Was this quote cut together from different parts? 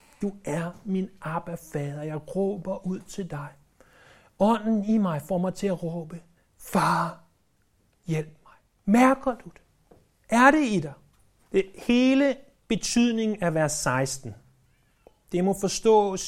yes; 1 cut; at 11.4 s

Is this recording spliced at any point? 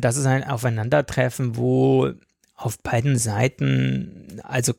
no; 0 cuts

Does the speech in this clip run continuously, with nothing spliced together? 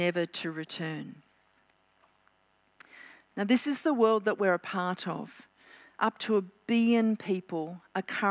yes; 0 cuts

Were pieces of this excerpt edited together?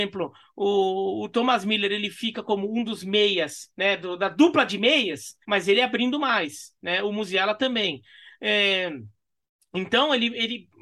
yes; 1 cut; at 5.4 s

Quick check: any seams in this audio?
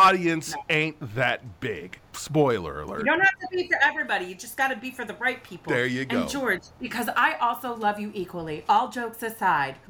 no; 0 cuts

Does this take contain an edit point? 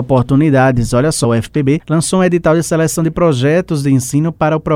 yes; 1 cut; at 1.2 s

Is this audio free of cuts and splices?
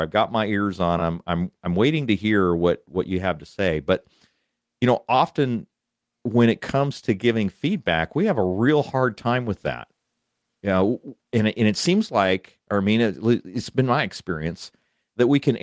yes; 0 cuts

